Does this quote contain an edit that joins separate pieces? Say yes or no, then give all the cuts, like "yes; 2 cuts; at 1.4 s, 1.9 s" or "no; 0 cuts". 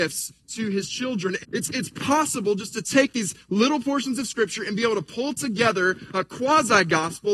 yes; 1 cut; at 1.4 s